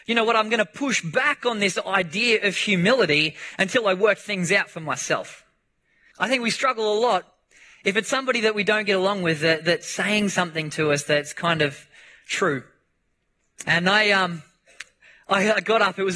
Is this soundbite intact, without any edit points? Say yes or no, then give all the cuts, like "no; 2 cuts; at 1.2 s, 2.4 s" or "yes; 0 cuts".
no; 2 cuts; at 6.1 s, 13.6 s